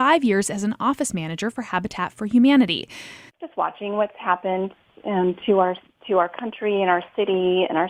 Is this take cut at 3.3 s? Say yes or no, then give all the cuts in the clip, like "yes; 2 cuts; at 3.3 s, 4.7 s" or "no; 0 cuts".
yes; 1 cut; at 3.3 s